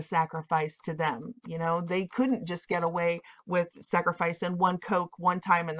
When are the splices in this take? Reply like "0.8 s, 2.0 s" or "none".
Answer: none

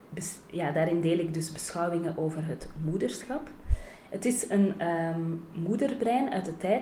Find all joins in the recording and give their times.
4.1 s

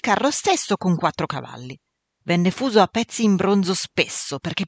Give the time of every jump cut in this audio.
2.2 s

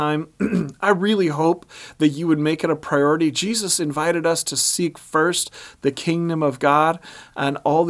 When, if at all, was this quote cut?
none

